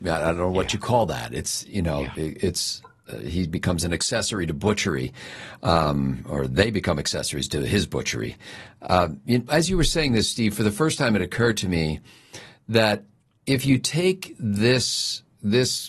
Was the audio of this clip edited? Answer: yes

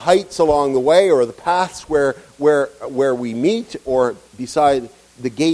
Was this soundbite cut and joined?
no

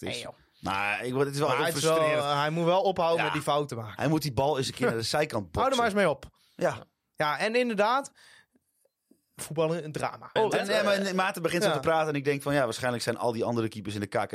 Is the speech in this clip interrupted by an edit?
yes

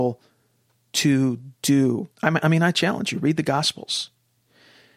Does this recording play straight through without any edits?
no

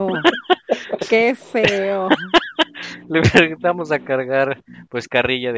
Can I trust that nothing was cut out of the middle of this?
no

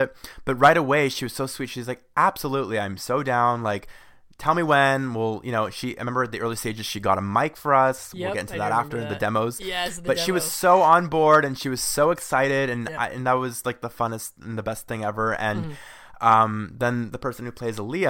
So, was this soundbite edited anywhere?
no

